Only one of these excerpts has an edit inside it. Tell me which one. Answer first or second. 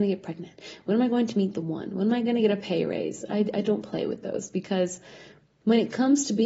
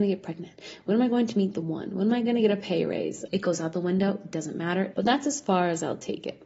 second